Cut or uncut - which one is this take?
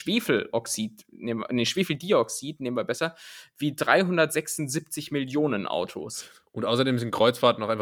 uncut